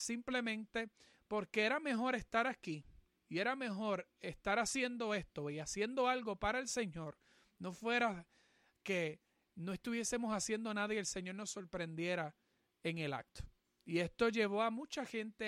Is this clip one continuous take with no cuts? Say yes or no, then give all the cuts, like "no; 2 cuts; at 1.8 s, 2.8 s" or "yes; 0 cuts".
yes; 0 cuts